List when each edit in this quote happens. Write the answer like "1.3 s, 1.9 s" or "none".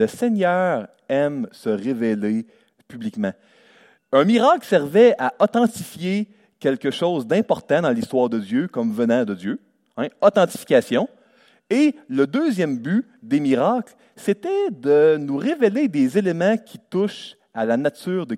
4.0 s